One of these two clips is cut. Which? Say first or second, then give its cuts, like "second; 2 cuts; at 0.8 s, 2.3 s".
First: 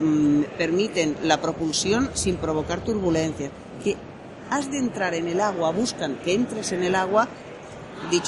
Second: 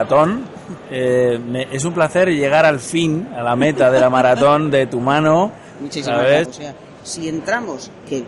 second; 1 cut; at 6.5 s